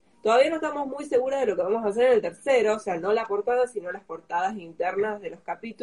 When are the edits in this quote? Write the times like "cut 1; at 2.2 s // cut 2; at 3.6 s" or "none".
none